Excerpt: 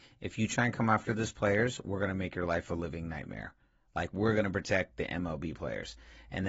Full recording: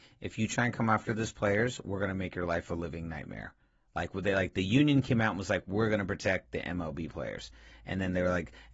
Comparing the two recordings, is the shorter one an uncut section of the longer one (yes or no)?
no